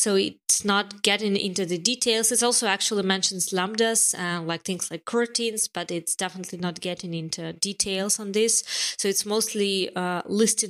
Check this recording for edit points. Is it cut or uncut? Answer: uncut